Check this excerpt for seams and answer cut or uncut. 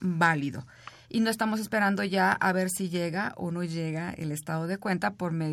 uncut